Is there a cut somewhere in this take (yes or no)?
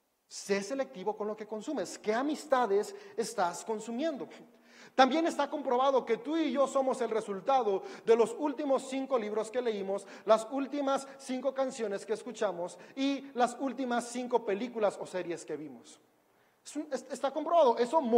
no